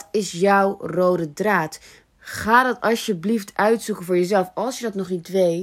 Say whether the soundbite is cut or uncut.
cut